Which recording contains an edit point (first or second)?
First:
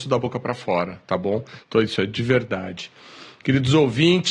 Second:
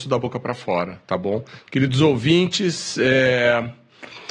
second